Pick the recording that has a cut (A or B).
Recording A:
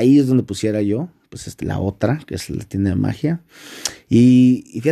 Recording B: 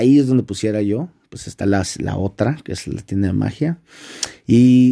A